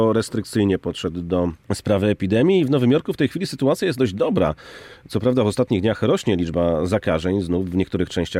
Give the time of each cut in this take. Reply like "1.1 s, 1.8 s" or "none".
1.6 s